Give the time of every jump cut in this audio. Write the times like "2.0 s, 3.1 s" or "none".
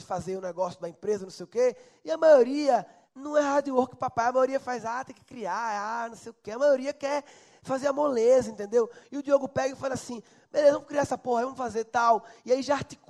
none